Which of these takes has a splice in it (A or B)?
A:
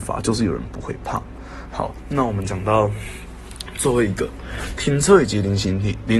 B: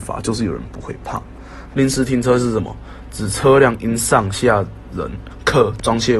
B